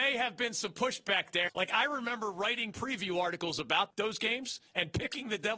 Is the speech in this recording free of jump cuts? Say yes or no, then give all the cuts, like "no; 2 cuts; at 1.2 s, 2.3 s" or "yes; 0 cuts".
no; 2 cuts; at 1.5 s, 3.9 s